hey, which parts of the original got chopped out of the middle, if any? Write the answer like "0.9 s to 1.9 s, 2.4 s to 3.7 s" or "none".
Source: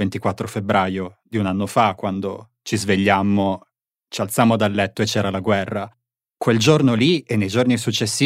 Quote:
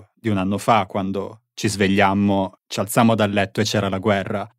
3.7 s to 4.0 s